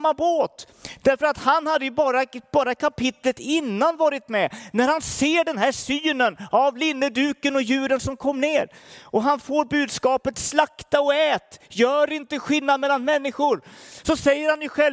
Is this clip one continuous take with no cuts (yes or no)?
no